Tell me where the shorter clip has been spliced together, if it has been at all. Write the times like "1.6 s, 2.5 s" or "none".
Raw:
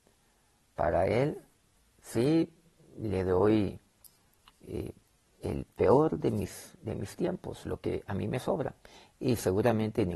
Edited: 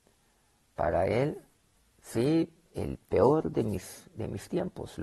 2.7 s